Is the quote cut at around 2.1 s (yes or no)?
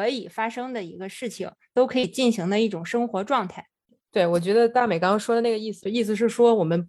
no